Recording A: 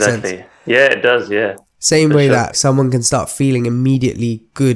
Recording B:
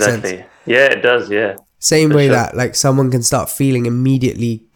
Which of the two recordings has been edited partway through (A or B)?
A